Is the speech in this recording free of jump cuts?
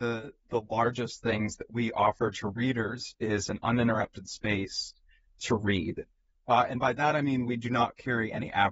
yes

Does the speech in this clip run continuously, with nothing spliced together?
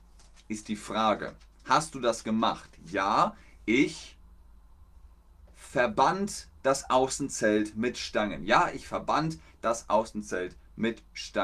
yes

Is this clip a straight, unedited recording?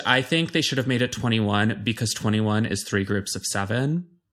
yes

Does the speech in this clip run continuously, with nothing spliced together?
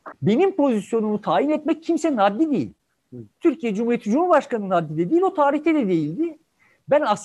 yes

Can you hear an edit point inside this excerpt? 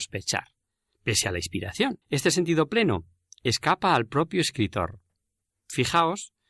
yes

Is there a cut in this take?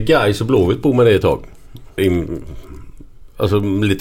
yes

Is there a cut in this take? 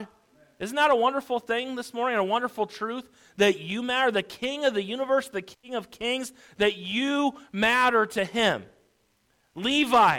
no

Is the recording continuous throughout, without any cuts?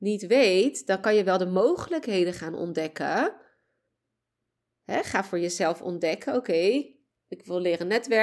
yes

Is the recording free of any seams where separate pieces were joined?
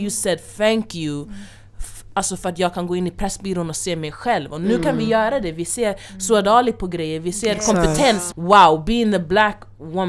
no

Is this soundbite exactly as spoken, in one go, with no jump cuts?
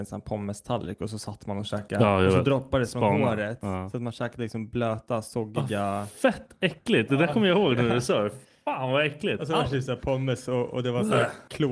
yes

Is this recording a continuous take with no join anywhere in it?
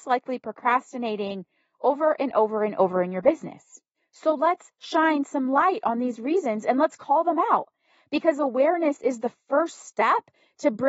yes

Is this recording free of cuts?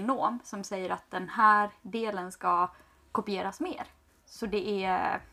no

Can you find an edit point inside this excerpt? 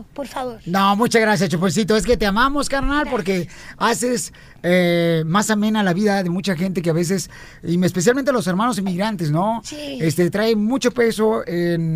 no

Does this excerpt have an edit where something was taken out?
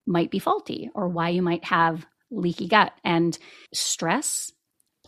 yes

